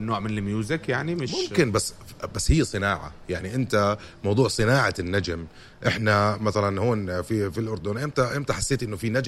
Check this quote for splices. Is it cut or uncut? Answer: uncut